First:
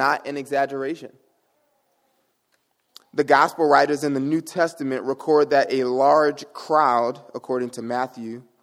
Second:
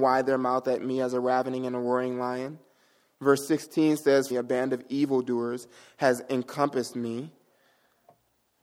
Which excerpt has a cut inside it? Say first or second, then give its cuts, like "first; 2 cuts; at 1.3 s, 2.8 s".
second; 1 cut; at 4.3 s